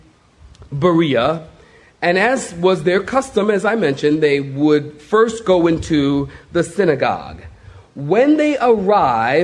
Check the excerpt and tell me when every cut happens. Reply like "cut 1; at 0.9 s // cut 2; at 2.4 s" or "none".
none